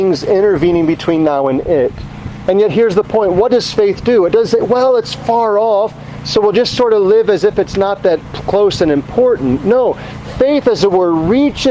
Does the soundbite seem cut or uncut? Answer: cut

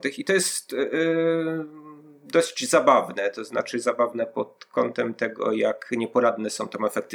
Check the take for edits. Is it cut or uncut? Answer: uncut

